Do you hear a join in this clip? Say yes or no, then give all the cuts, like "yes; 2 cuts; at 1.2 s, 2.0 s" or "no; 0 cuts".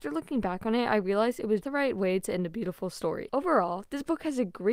yes; 2 cuts; at 1.6 s, 3.3 s